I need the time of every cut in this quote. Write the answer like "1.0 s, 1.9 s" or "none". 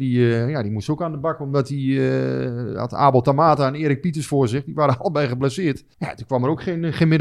5.9 s